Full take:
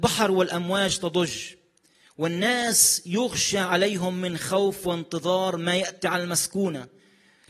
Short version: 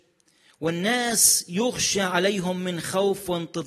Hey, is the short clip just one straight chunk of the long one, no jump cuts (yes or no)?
yes